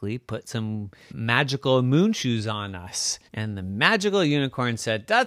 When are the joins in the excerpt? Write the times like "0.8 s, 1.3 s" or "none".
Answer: 1.1 s, 3.3 s